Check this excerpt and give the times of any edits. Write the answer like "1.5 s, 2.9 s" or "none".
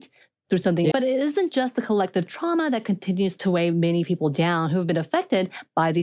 0.9 s